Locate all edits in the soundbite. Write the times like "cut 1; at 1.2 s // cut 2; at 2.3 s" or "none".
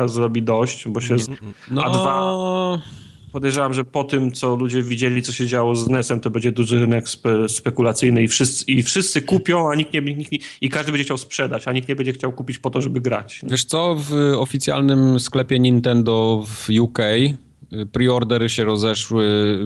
cut 1; at 1.2 s